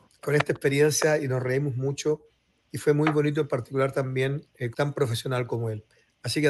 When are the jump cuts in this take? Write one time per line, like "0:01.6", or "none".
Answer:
0:04.7